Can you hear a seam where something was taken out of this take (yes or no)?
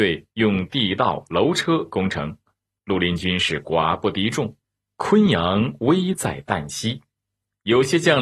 no